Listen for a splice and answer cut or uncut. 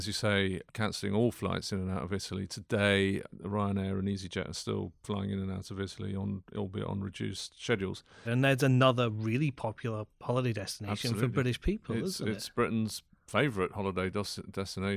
cut